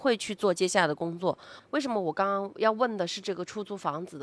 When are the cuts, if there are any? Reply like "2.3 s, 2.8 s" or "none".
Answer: 1.6 s